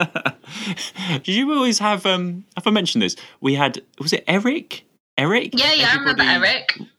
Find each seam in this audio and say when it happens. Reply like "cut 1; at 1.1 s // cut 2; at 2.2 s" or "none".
none